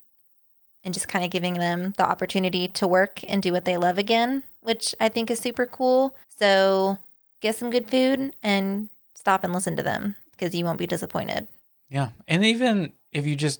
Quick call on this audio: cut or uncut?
cut